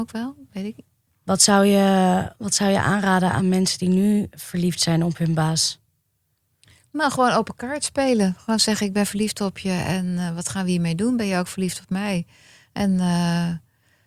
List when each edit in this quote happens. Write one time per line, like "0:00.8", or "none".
none